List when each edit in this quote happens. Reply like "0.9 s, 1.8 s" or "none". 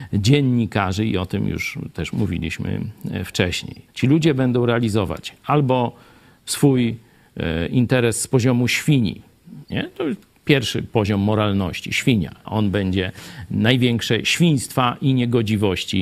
3.9 s, 9.6 s, 12.5 s